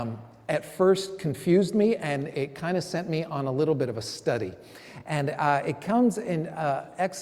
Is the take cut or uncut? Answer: uncut